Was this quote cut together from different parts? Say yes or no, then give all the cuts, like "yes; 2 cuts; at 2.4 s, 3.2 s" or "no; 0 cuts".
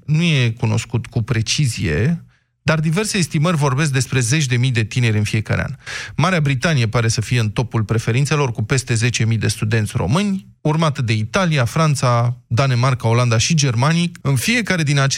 yes; 2 cuts; at 10.6 s, 14.2 s